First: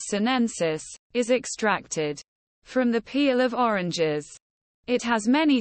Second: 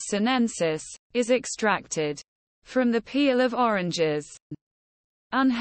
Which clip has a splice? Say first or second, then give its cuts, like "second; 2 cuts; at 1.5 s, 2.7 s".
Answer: second; 1 cut; at 4.5 s